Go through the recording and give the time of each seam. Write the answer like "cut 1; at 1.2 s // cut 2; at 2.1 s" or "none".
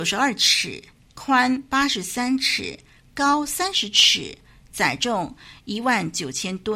none